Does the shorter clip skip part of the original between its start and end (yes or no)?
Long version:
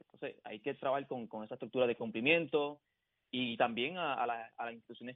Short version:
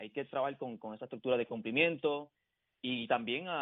no